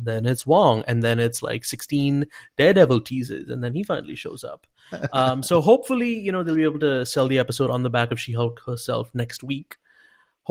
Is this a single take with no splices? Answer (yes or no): yes